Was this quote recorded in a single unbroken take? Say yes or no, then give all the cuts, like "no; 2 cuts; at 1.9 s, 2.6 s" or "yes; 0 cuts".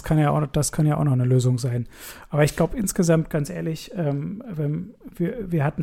yes; 0 cuts